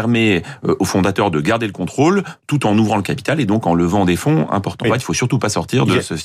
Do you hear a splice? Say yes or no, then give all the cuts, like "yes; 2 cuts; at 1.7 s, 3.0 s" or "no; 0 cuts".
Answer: yes; 1 cut; at 4.8 s